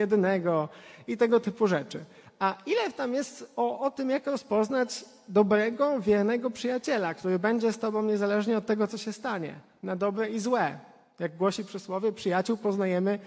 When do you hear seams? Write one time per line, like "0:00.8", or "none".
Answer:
none